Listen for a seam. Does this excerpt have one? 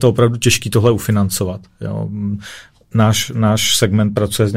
no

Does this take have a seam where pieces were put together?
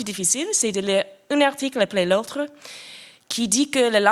no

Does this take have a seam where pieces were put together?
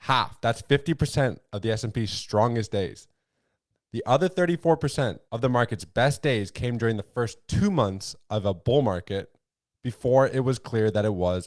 yes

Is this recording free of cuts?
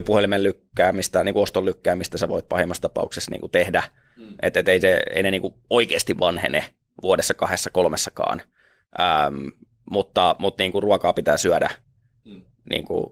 yes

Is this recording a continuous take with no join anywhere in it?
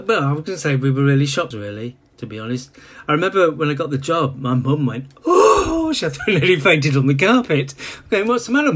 no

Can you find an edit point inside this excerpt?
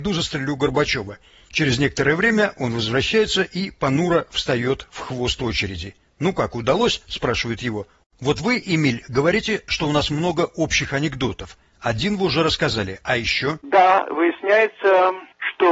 yes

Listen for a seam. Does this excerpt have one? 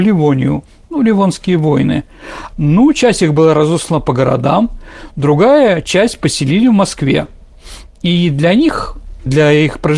yes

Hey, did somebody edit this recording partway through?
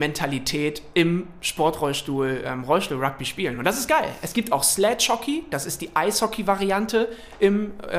no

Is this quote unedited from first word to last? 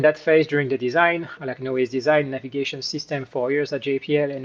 no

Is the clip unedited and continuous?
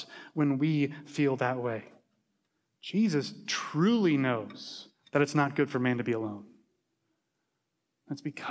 yes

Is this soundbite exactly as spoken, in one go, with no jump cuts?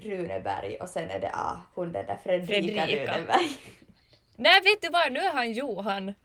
yes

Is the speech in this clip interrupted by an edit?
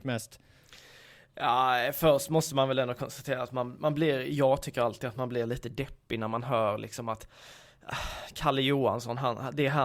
no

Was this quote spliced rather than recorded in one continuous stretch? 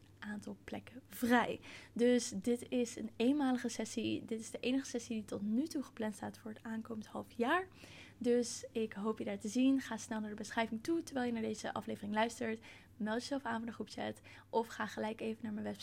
no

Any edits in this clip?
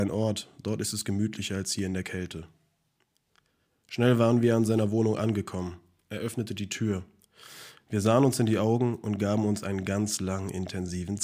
yes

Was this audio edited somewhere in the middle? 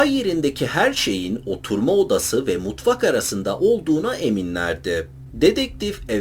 yes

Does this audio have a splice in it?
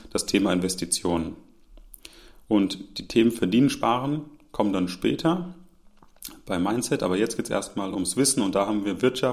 no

